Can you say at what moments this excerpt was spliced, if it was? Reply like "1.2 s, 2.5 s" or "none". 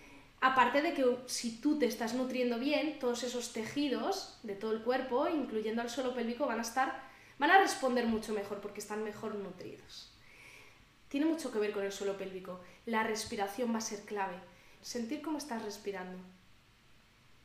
11.0 s, 14.8 s